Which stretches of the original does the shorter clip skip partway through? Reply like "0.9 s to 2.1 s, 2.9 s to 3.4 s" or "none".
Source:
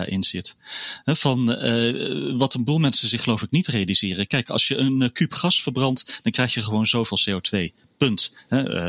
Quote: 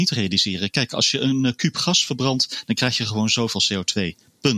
none

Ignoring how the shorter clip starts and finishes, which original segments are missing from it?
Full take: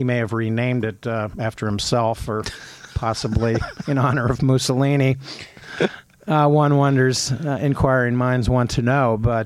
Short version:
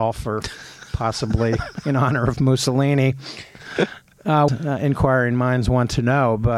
6.5 s to 7.3 s

